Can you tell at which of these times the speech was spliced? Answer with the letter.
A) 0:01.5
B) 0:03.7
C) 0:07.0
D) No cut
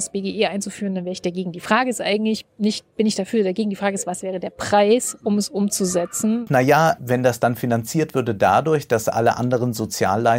C